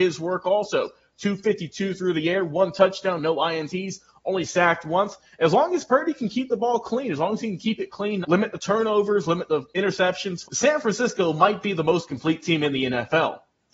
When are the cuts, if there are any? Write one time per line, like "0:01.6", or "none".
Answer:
0:08.2
0:10.4